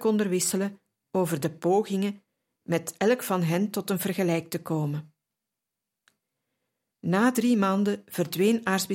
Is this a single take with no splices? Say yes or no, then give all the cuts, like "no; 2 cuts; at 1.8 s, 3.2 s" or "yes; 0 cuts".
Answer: yes; 0 cuts